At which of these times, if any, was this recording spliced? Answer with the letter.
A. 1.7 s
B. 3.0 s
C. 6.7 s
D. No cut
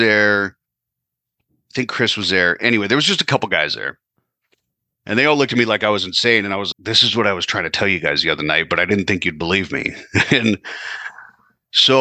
C